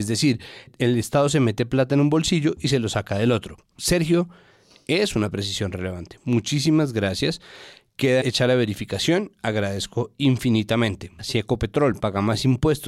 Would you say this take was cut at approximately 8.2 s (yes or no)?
yes